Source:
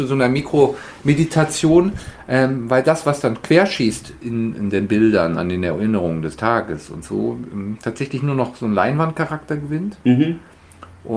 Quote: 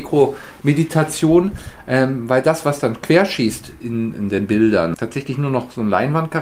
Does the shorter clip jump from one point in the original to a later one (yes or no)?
yes